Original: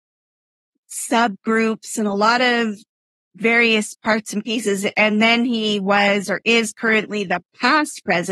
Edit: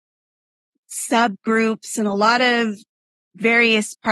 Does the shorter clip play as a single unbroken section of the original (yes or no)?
yes